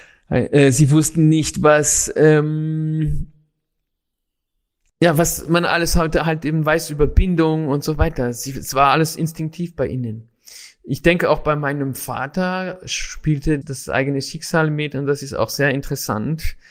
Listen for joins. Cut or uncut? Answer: cut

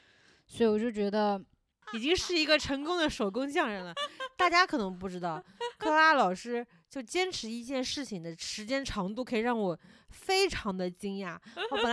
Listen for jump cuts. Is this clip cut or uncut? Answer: cut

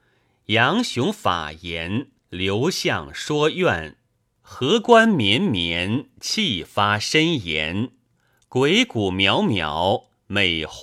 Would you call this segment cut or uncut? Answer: cut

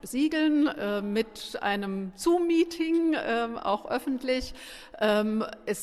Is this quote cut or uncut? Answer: uncut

